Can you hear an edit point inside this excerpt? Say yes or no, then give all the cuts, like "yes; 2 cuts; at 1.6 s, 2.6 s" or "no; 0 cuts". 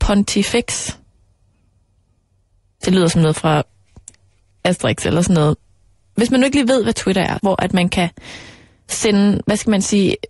yes; 1 cut; at 7.4 s